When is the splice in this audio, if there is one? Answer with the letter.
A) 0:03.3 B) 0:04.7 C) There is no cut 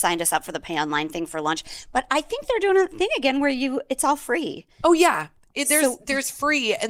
C